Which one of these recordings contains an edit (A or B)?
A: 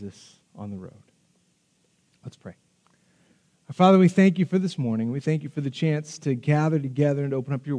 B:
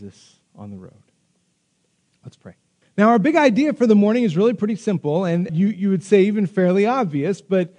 B